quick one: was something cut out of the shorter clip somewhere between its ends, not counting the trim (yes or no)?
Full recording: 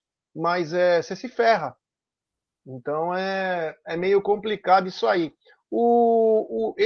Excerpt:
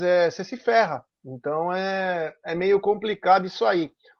yes